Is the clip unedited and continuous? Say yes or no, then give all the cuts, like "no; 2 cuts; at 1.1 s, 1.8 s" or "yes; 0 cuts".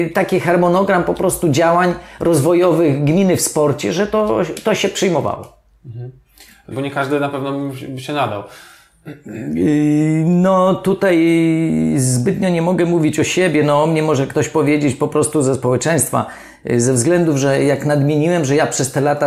no; 1 cut; at 6.7 s